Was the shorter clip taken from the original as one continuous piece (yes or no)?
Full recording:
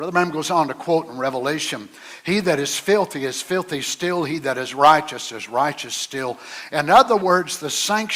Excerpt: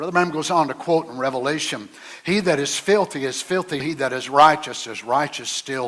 no